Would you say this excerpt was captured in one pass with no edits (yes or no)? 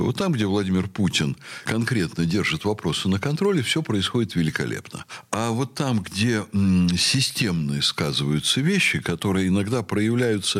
yes